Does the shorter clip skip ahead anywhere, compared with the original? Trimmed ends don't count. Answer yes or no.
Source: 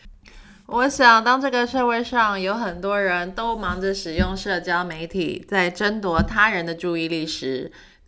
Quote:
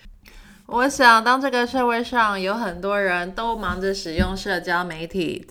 no